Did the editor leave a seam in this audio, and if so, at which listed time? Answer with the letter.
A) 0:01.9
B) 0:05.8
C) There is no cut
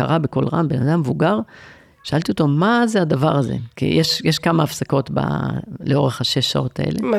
C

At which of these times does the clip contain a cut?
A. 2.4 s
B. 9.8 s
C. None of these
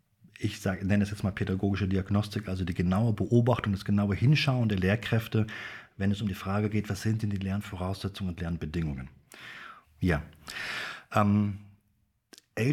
B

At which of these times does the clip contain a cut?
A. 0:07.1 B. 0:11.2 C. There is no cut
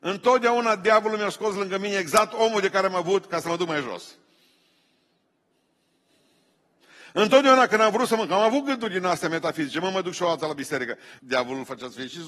B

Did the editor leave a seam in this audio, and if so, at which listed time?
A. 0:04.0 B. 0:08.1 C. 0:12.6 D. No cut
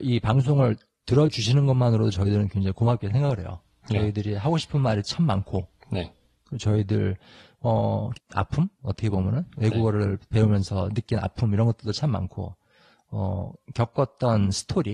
B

